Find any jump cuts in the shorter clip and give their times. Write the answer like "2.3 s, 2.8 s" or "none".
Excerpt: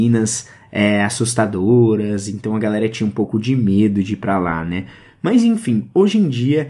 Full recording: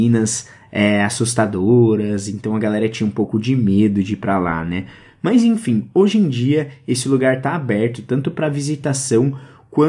none